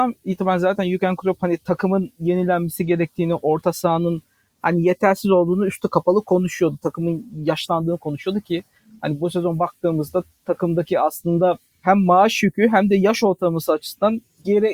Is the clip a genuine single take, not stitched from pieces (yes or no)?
yes